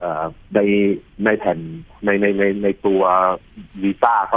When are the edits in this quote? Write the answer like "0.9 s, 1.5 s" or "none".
none